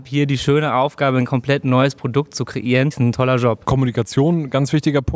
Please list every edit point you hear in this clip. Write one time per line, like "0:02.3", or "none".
0:02.9